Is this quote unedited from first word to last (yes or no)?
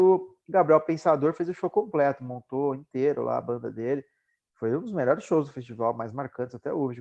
yes